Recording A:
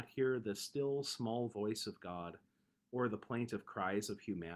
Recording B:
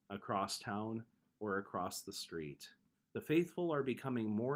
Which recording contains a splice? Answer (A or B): B